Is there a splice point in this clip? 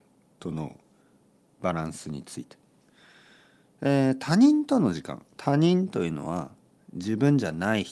no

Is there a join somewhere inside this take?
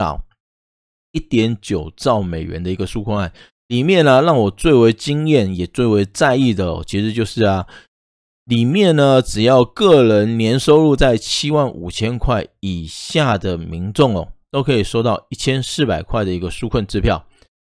no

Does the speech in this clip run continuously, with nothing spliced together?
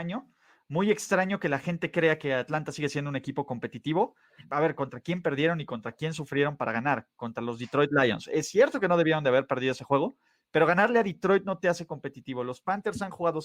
no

